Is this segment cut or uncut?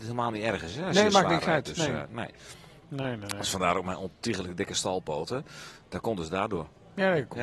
uncut